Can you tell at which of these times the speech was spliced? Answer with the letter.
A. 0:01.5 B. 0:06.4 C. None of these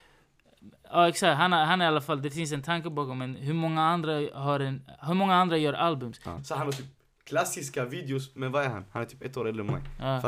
B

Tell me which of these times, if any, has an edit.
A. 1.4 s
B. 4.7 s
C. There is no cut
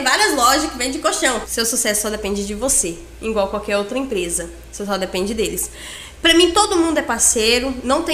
A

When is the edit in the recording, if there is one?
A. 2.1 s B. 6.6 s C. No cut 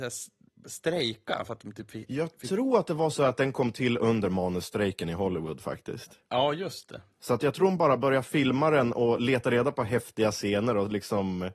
C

